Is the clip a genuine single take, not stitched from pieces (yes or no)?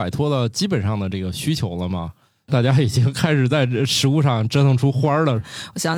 yes